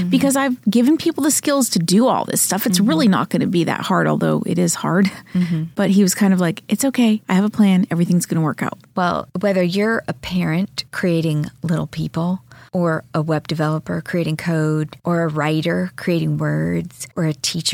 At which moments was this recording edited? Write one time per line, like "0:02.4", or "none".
none